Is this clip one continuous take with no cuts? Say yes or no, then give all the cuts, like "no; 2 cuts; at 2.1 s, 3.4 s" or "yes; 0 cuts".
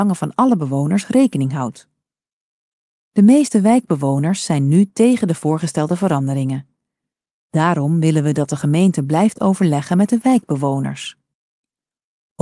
yes; 0 cuts